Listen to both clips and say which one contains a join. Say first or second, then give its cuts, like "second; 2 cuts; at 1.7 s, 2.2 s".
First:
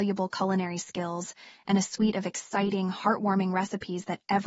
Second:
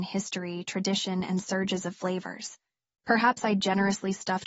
second; 1 cut; at 2.9 s